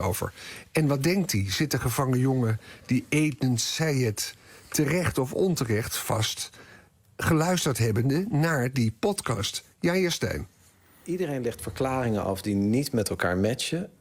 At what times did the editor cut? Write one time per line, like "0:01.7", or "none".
none